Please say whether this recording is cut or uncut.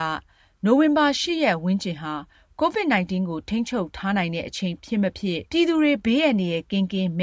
cut